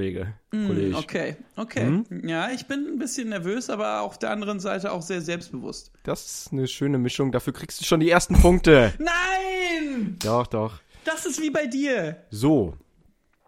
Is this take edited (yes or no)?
no